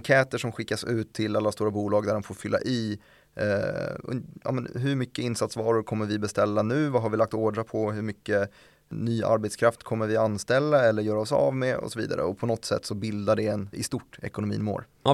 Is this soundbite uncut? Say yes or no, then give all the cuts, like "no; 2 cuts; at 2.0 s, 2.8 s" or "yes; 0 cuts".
no; 1 cut; at 13.7 s